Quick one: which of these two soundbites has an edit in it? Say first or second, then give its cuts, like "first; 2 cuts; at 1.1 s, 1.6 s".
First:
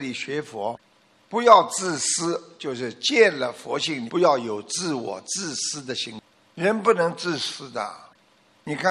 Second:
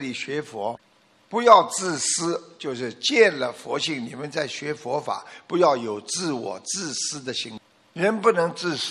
first; 1 cut; at 4.1 s